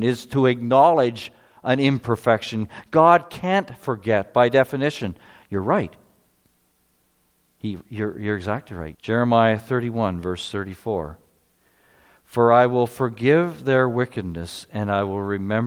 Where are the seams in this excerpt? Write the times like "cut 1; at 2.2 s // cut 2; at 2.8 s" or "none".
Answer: cut 1; at 8.9 s